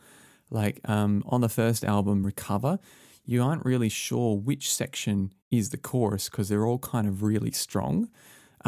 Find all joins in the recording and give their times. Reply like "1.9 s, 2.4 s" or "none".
none